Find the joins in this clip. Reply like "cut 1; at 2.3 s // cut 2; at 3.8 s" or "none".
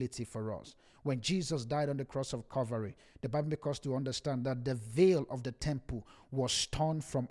none